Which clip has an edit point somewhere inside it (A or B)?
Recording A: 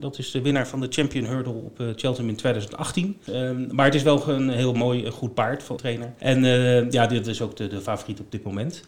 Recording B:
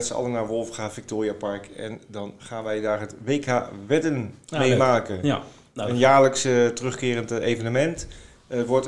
A